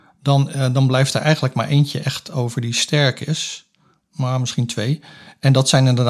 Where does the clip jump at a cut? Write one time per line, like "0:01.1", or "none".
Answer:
none